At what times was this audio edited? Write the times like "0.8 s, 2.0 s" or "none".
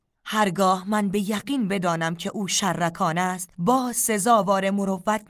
3.5 s